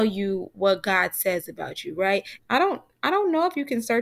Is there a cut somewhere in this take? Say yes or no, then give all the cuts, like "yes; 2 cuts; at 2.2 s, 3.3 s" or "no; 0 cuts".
yes; 1 cut; at 2.4 s